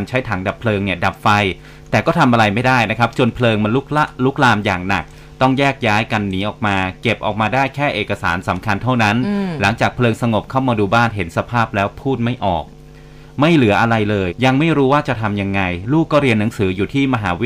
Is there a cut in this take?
yes; 1 cut; at 14.3 s

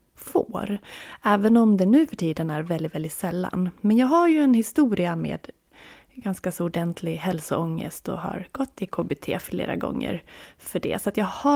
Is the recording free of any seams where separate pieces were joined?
yes; 0 cuts

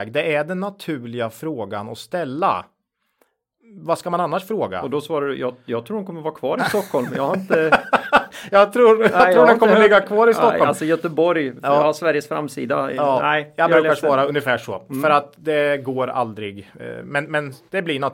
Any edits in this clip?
no; 0 cuts

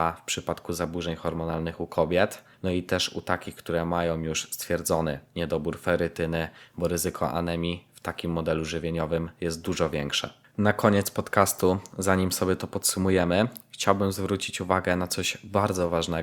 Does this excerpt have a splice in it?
yes; 2 cuts; at 2.5 s, 6.7 s

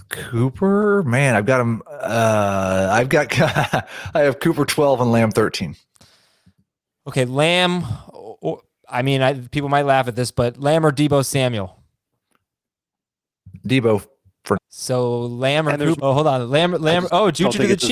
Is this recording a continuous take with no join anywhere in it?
no; 2 cuts; at 14.6 s, 16.0 s

